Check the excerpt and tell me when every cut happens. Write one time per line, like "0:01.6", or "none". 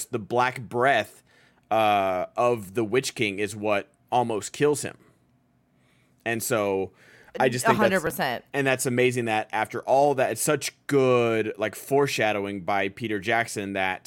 none